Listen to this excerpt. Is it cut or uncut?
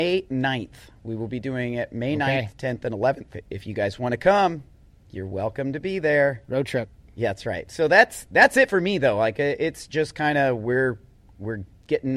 uncut